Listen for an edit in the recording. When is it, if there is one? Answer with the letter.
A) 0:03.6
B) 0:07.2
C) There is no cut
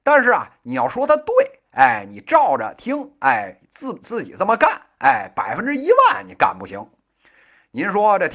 C